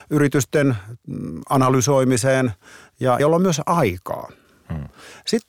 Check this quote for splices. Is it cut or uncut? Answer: cut